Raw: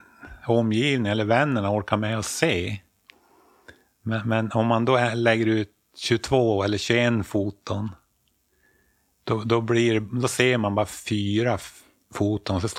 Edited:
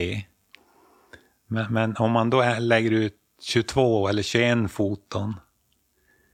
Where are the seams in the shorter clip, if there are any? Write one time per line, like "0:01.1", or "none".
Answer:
none